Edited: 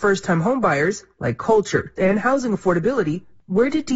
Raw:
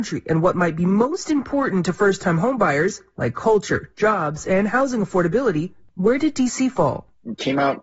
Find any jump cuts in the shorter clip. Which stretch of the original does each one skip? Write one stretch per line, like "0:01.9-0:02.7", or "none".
0:03.9-0:04.4